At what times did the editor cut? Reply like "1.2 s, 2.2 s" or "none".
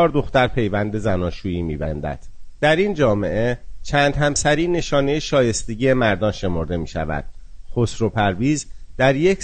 2.6 s

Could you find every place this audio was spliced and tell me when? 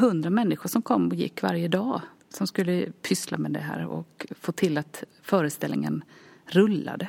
2.2 s

